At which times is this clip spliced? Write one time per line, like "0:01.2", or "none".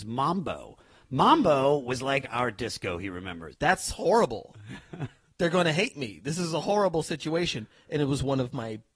0:03.5